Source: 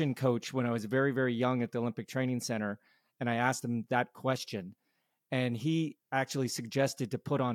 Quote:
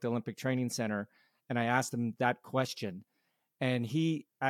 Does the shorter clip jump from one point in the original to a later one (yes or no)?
no